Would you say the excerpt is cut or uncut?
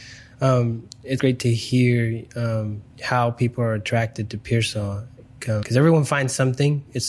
cut